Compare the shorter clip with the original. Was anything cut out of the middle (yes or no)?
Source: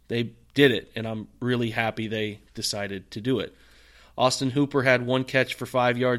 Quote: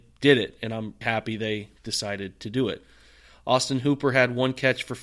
yes